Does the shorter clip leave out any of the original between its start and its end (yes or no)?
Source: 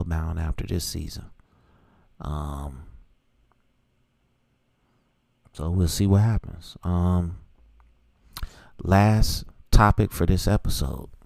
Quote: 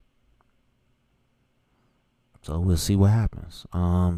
no